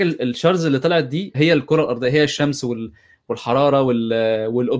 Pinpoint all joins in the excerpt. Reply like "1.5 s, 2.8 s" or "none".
1.3 s